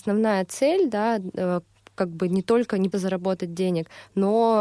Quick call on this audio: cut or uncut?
cut